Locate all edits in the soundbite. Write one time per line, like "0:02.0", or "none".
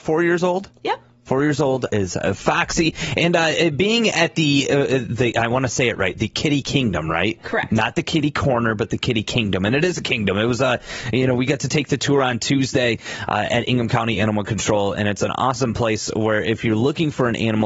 0:01.9

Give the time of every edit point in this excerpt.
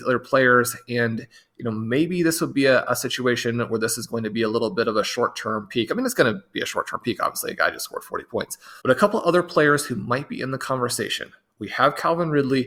0:08.8

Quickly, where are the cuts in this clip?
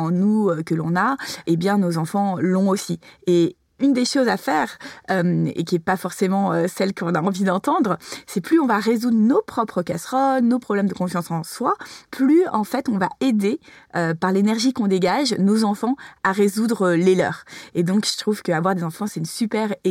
none

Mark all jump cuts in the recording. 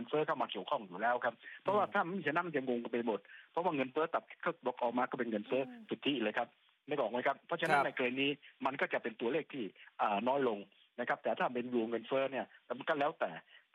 none

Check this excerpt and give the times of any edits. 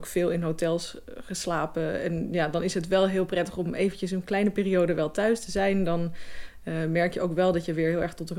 none

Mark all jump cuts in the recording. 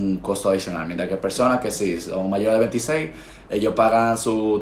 none

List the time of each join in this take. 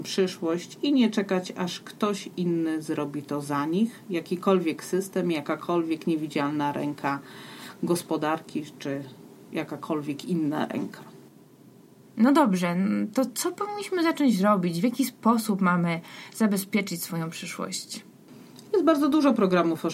none

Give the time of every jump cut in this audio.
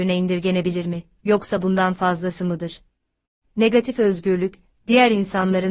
0:03.4

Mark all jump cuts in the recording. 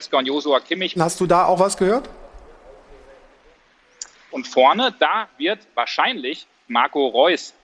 0:01.0
0:04.3
0:06.7

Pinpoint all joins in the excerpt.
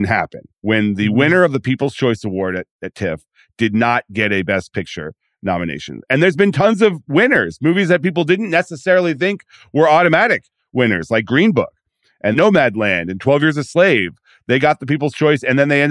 0:12.3

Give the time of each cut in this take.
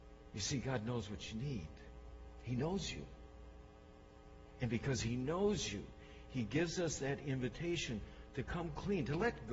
none

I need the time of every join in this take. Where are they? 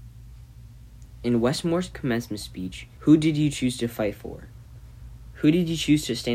0:03.0

